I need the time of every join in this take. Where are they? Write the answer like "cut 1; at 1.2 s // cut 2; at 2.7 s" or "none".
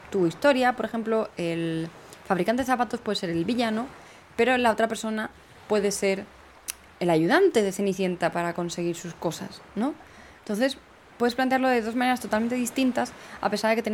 cut 1; at 6.9 s